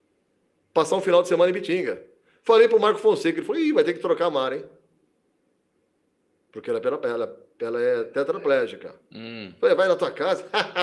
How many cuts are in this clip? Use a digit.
0